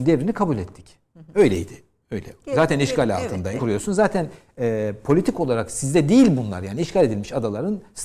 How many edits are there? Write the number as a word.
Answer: one